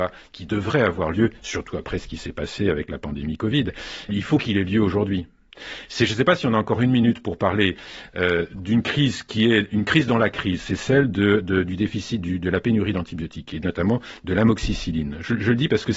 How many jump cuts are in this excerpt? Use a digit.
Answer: 1